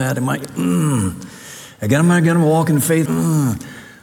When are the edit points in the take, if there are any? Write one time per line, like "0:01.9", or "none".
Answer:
0:03.1